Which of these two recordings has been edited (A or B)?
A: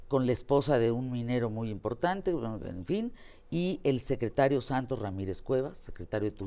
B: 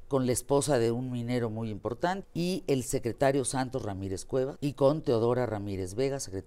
B